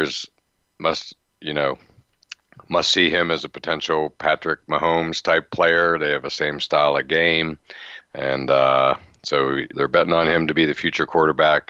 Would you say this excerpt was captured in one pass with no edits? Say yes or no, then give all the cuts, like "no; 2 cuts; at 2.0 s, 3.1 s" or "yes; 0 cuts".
no; 2 cuts; at 8.0 s, 9.7 s